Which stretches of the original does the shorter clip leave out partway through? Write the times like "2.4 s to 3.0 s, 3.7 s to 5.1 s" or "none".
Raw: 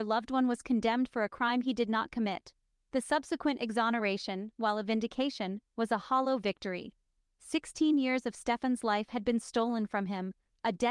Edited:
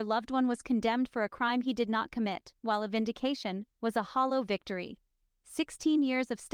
2.6 s to 4.6 s